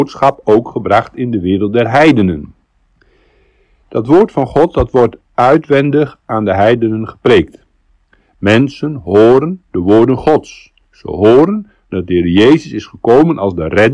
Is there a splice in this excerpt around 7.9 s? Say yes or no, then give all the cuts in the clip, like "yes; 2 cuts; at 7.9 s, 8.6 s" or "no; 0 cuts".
no; 0 cuts